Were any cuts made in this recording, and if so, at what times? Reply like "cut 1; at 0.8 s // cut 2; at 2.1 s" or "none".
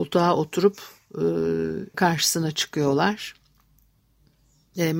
cut 1; at 1.9 s

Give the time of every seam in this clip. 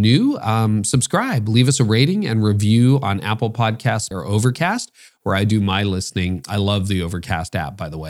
cut 1; at 4.1 s

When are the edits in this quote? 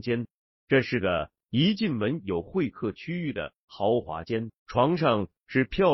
cut 1; at 4.6 s

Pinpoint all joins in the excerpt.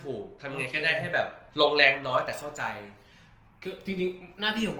cut 1; at 1.5 s

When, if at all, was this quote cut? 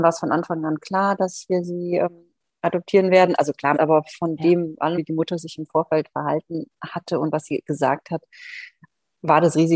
cut 1; at 3.7 s // cut 2; at 4.9 s

